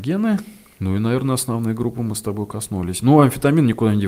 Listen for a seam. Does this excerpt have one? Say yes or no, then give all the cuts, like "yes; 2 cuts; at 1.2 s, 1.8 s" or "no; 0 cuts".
no; 0 cuts